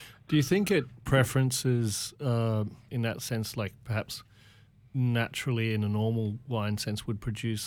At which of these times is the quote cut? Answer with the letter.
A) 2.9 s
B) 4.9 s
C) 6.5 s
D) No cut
A